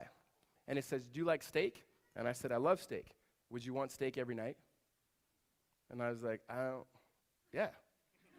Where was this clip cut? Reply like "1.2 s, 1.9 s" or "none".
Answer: none